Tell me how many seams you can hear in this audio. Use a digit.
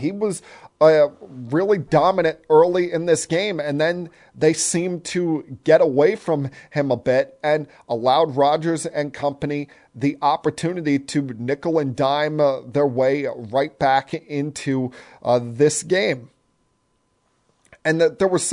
0